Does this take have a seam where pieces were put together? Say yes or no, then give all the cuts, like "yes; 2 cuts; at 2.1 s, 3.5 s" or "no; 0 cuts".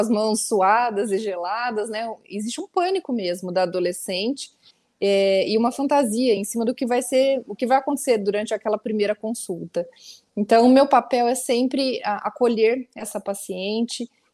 no; 0 cuts